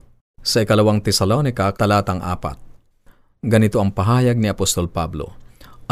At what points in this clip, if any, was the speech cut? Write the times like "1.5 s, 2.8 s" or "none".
1.7 s